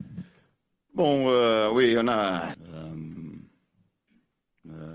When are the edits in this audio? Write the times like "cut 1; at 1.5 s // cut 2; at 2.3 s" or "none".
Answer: cut 1; at 2.5 s